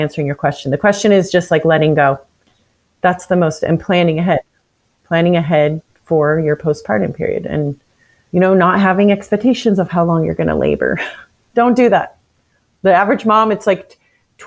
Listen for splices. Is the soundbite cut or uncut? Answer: uncut